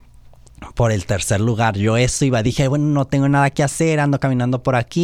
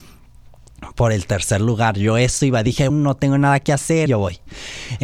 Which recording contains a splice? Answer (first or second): second